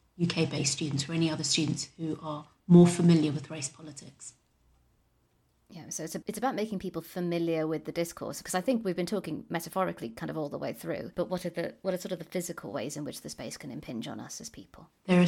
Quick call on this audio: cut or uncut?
cut